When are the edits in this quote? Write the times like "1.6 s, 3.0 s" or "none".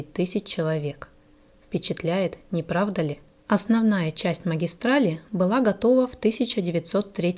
3.4 s